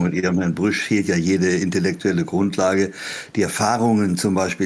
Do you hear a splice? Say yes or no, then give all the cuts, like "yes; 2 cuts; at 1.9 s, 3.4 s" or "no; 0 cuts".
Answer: no; 0 cuts